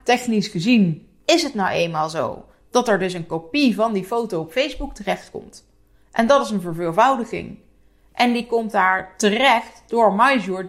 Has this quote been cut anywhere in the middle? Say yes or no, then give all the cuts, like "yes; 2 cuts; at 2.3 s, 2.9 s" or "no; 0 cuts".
no; 0 cuts